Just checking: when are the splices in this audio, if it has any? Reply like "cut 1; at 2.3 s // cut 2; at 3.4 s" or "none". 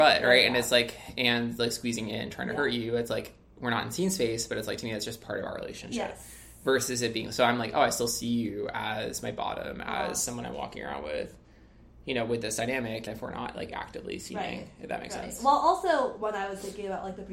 cut 1; at 13.1 s